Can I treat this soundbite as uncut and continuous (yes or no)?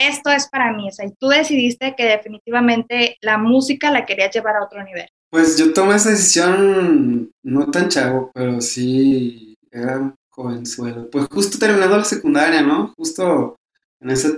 yes